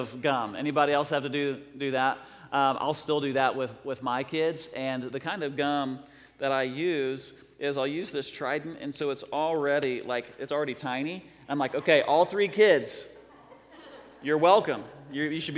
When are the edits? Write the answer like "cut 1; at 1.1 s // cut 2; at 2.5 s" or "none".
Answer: none